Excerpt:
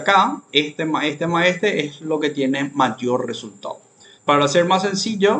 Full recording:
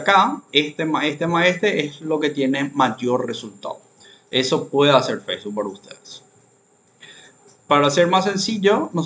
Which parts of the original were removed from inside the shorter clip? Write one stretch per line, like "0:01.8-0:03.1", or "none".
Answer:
0:04.2-0:07.6